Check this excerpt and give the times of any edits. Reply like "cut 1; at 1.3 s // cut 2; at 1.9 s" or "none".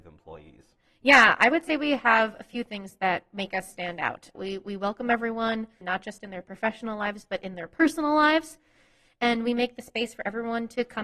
cut 1; at 4.4 s // cut 2; at 5.8 s